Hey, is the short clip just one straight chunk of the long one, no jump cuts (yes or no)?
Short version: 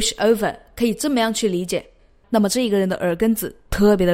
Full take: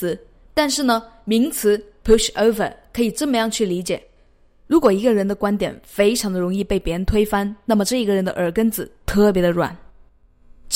no